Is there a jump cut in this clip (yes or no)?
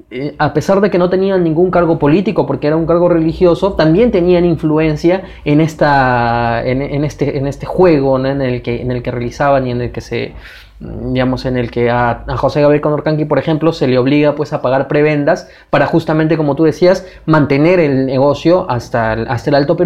no